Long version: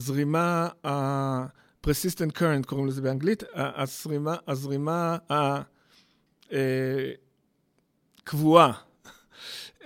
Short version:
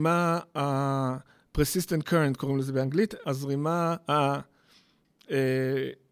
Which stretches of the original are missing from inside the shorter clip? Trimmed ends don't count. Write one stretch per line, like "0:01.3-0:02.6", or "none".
0:03.5-0:04.4